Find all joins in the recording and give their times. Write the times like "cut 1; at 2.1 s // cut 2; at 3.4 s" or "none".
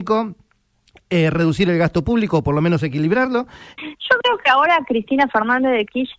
cut 1; at 3.8 s